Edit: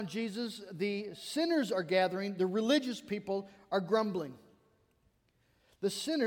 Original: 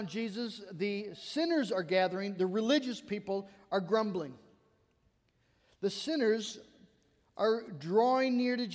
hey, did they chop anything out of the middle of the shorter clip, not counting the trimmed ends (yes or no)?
no